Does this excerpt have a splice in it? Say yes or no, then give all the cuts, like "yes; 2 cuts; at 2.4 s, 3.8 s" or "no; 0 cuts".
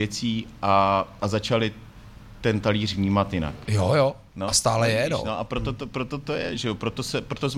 yes; 1 cut; at 3.7 s